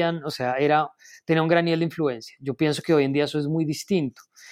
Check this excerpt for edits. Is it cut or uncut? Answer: uncut